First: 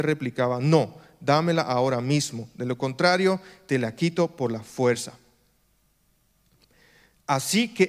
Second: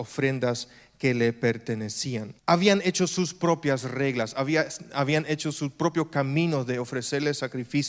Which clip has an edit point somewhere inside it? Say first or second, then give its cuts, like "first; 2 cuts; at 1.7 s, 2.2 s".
second; 1 cut; at 2.4 s